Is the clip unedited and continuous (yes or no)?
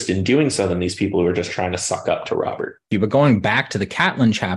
no